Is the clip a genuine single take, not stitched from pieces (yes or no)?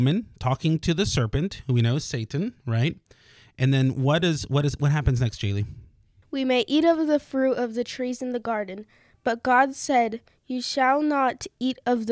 yes